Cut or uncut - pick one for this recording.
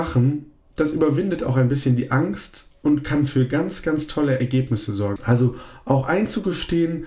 cut